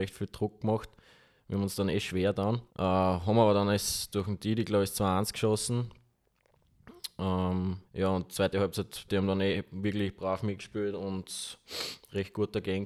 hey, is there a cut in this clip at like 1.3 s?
no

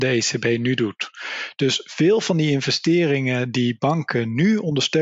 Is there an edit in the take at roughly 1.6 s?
no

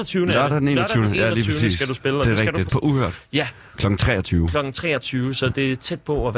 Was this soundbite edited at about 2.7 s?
yes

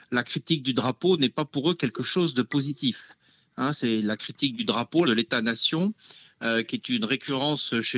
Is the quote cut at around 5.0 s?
yes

